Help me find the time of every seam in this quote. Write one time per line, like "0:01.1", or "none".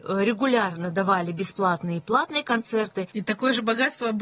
0:03.1